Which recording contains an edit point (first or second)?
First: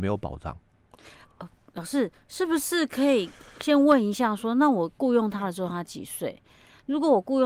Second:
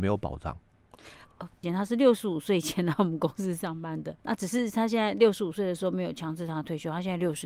second